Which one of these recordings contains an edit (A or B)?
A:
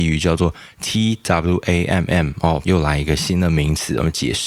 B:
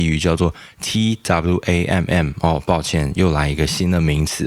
A